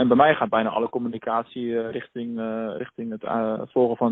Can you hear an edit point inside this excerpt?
no; 0 cuts

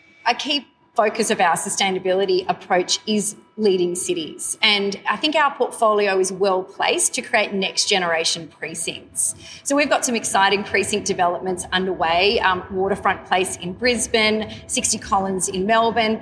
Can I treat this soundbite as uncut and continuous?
yes; 0 cuts

